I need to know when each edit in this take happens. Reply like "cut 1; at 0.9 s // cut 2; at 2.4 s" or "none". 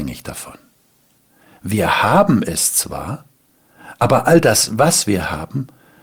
none